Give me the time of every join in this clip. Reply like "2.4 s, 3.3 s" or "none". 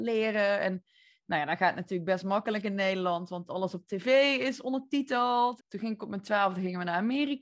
5.6 s